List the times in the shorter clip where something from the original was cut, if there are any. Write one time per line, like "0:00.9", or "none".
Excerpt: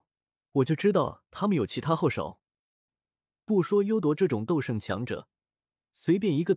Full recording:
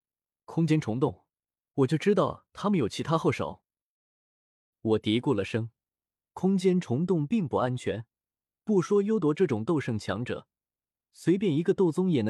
0:02.9